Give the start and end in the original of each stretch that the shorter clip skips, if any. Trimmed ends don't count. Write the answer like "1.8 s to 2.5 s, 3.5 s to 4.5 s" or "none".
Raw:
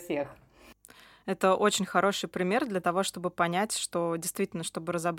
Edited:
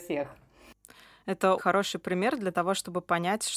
1.6 s to 1.9 s